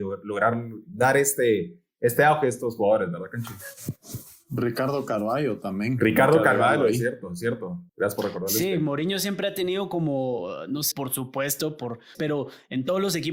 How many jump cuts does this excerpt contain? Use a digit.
3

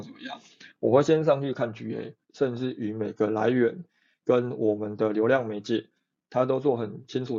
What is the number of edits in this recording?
1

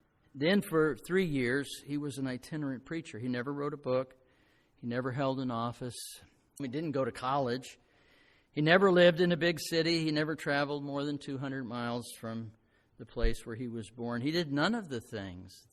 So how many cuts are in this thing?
1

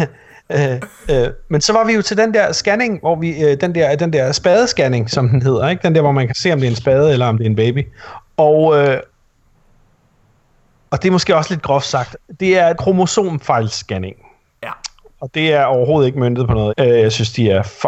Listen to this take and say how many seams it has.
2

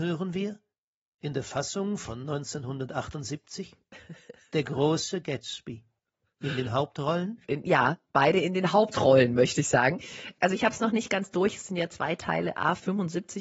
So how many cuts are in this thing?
1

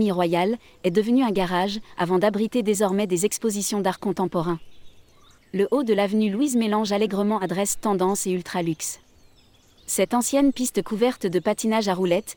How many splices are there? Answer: 2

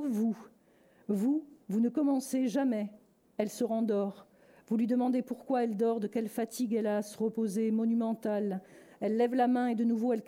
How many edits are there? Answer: 0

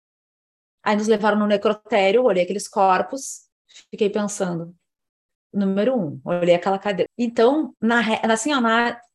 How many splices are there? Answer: 2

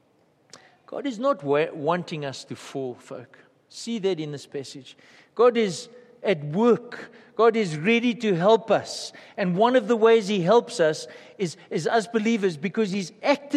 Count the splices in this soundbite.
0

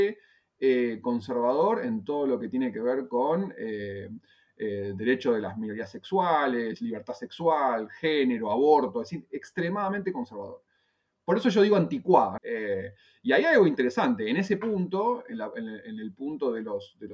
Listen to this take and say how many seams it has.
1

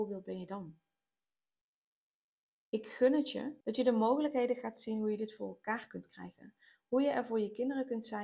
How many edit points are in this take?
1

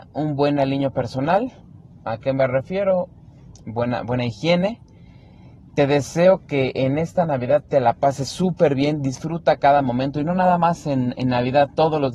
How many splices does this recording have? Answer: 0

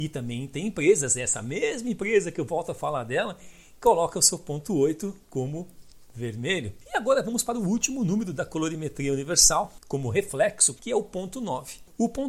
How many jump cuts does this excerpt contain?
2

